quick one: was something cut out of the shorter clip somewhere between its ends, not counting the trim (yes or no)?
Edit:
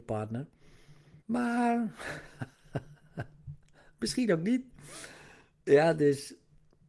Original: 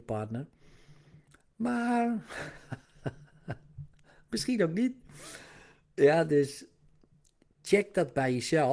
yes